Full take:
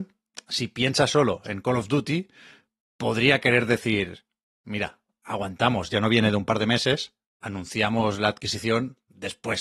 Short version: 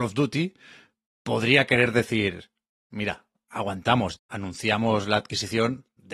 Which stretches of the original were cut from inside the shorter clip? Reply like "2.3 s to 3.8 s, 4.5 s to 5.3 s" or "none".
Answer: 5.9 s to 7.3 s